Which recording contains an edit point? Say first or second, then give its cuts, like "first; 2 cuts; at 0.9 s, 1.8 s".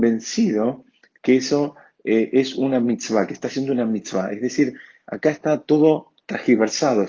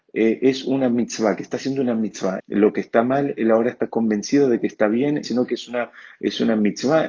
second; 2 cuts; at 2.4 s, 5.2 s